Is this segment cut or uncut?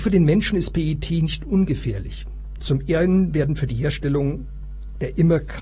cut